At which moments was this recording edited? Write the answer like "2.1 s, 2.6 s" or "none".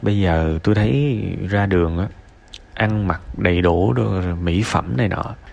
2.7 s